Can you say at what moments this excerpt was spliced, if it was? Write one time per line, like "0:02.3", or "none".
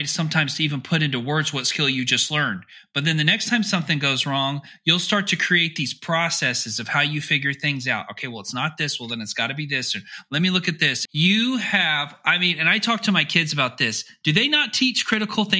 0:11.0

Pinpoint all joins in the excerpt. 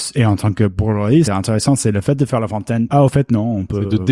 0:01.3
0:02.9

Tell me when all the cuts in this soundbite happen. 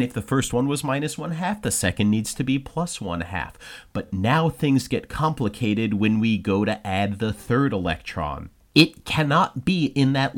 none

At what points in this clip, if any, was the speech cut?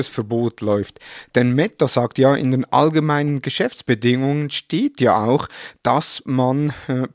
none

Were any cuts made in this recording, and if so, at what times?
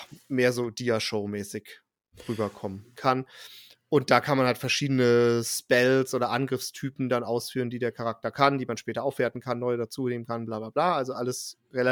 0:03.0

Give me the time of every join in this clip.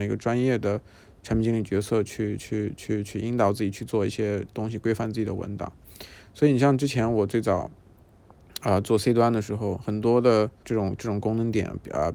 0:10.6

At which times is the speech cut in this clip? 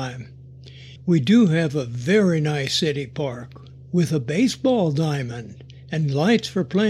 0:01.0

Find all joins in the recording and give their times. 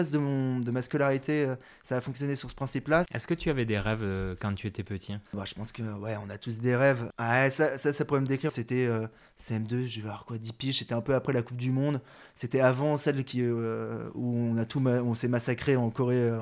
0:03.0
0:05.3
0:08.5

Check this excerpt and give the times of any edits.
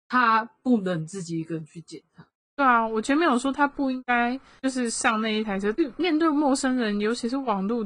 0:02.5
0:05.7

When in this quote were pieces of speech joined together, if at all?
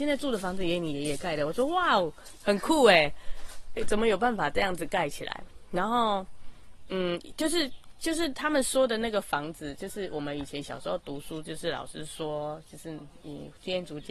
0:03.8

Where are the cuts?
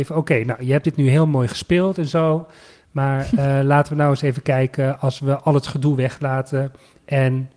none

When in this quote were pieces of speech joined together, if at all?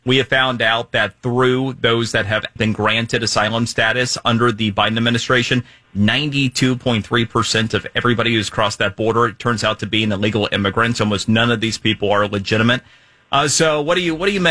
0:02.6

